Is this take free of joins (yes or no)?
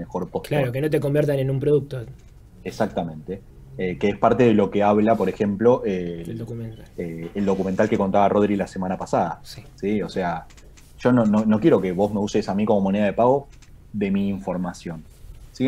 yes